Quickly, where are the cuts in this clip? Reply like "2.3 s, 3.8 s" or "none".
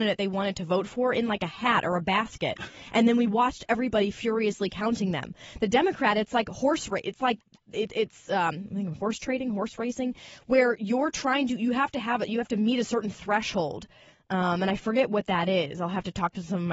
none